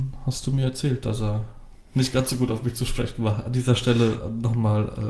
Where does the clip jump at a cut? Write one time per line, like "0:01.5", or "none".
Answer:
none